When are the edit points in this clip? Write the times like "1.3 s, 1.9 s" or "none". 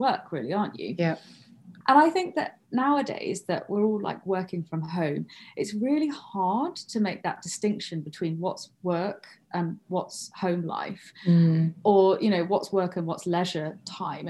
1.8 s